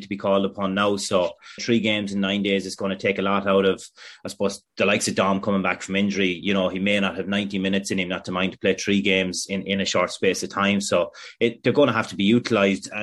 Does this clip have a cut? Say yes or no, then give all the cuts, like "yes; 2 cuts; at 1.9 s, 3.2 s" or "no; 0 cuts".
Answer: yes; 1 cut; at 1.6 s